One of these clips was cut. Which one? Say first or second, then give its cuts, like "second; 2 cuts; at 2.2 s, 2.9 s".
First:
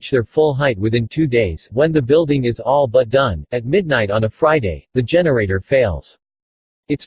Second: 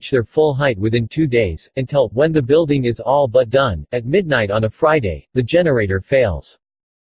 first; 1 cut; at 1.7 s